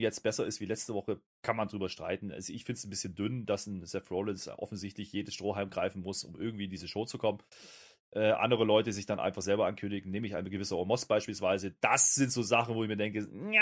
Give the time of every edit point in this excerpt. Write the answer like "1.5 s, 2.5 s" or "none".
1.3 s

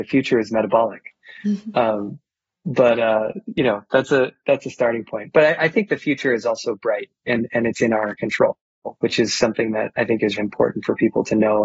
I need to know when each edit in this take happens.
9.0 s, 10.4 s

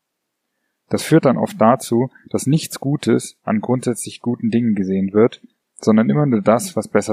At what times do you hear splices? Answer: none

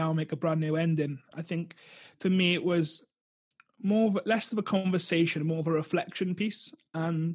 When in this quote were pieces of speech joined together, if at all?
1.3 s

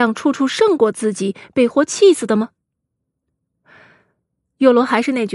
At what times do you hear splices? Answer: 1.7 s

